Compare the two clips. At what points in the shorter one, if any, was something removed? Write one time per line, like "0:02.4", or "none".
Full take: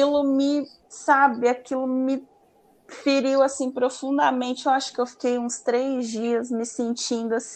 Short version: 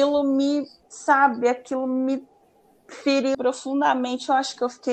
0:03.3